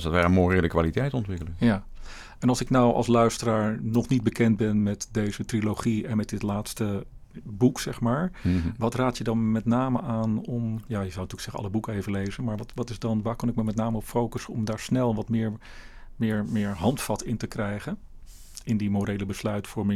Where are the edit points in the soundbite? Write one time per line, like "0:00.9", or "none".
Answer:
none